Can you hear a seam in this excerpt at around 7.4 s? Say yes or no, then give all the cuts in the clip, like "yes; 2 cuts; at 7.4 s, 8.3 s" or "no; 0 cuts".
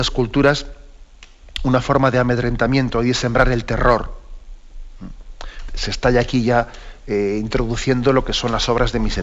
no; 1 cut; at 5.7 s